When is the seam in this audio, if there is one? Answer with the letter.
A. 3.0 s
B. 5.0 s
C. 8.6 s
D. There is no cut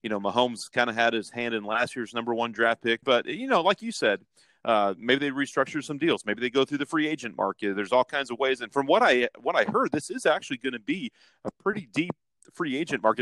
A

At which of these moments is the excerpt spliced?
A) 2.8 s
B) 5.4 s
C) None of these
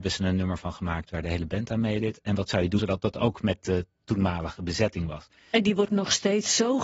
A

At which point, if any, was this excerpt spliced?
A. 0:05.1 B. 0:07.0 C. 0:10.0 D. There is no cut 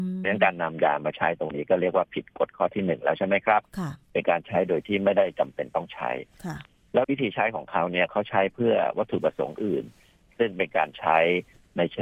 B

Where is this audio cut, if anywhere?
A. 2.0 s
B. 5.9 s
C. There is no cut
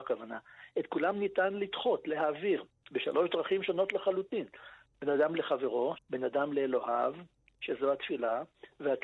B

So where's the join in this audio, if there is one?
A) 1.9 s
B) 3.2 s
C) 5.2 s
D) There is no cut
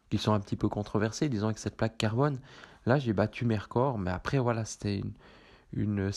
D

